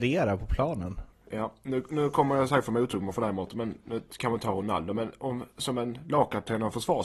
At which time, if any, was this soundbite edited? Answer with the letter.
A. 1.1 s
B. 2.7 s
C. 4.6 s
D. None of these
A